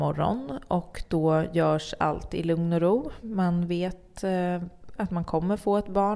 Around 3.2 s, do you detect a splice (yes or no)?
no